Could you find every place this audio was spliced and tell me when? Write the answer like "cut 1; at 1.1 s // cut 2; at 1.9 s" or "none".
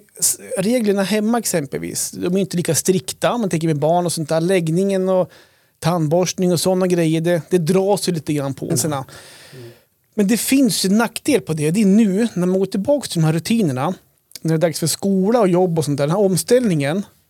cut 1; at 8.7 s